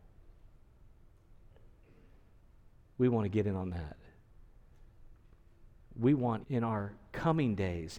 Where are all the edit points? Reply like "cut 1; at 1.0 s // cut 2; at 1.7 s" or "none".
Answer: cut 1; at 6.4 s

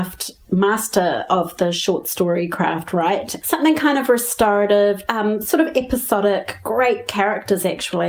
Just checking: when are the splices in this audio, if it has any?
cut 1; at 3.4 s // cut 2; at 5.1 s

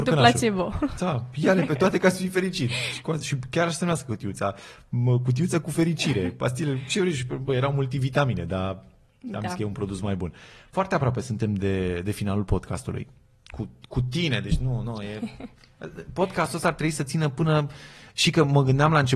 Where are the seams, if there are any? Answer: none

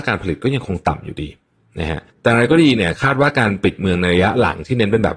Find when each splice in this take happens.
cut 1; at 2.1 s

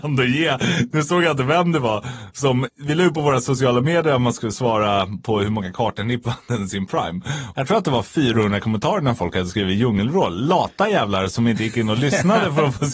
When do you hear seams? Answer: cut 1; at 2.7 s // cut 2; at 7.5 s

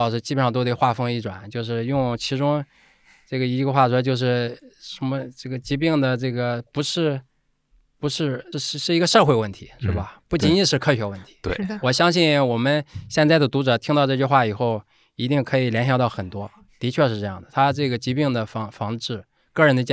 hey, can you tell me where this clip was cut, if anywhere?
cut 1; at 8.5 s

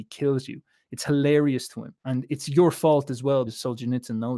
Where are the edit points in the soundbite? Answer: cut 1; at 2.0 s // cut 2; at 3.5 s

